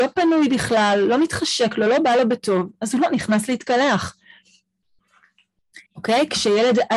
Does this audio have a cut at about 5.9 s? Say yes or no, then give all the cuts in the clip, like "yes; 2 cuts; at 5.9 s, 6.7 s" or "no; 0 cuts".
yes; 1 cut; at 5.9 s